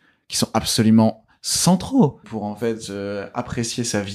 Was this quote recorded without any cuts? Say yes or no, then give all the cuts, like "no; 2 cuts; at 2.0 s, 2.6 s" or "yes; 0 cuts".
no; 1 cut; at 2.2 s